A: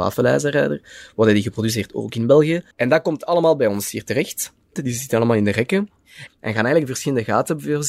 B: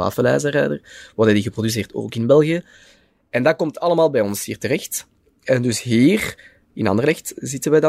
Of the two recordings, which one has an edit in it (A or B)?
A